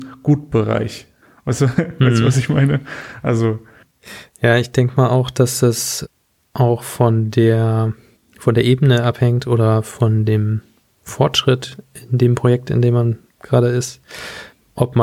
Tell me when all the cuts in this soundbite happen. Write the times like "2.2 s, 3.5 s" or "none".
none